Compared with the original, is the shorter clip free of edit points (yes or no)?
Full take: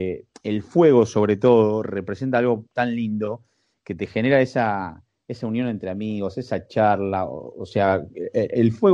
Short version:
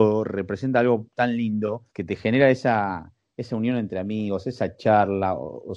no